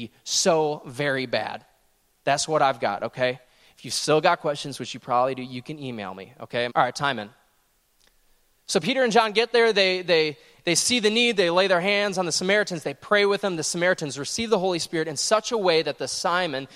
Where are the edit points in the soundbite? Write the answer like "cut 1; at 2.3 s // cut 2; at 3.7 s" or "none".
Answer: cut 1; at 6.7 s